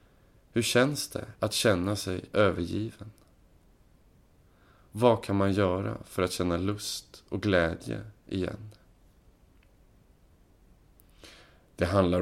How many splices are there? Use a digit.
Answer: 0